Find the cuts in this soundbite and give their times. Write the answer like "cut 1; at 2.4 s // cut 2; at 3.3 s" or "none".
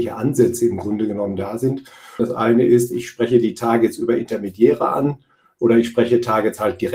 cut 1; at 2.2 s